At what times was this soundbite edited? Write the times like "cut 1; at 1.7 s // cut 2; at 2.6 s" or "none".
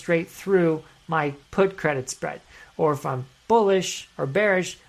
cut 1; at 1.4 s